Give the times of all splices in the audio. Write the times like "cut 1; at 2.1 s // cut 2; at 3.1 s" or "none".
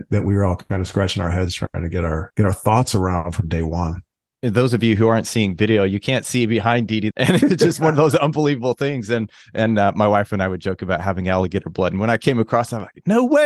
cut 1; at 7.1 s